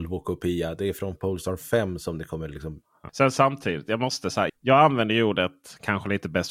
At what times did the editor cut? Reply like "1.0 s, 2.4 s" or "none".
3.1 s, 4.5 s